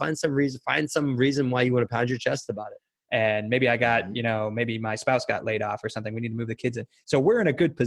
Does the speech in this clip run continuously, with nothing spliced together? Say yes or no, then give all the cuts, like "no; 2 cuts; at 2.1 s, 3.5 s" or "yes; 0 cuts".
no; 1 cut; at 3.0 s